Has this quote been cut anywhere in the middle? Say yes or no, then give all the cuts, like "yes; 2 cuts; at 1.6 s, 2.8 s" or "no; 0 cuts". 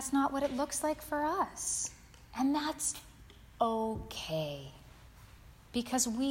no; 0 cuts